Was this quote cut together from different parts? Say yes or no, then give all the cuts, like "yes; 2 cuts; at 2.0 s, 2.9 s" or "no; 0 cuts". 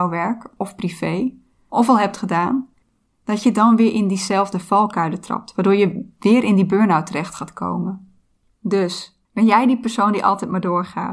yes; 2 cuts; at 3.1 s, 9.3 s